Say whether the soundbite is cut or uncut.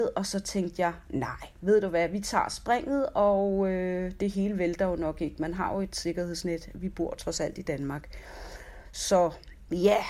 uncut